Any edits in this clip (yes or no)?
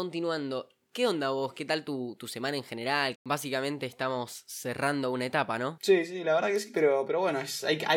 yes